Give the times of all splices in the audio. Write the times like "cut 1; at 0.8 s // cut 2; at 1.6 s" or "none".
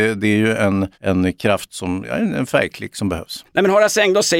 cut 1; at 0.9 s // cut 2; at 3.5 s